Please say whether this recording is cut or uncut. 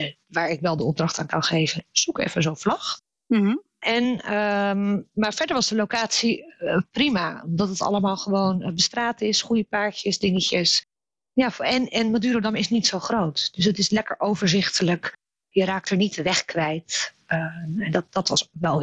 uncut